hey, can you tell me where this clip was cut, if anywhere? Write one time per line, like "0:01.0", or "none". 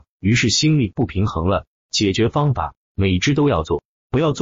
none